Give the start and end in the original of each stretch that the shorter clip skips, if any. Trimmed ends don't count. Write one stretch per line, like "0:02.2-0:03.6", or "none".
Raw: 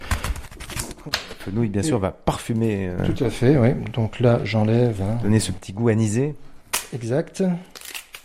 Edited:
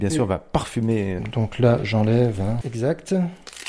0:02.9-0:03.8
0:05.2-0:06.9